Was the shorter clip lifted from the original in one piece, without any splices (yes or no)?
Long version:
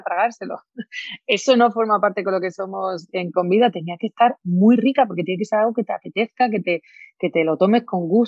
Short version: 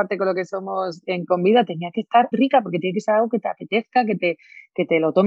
no